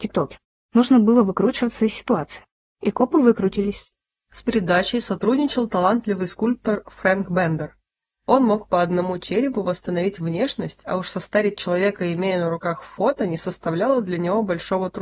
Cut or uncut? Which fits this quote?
uncut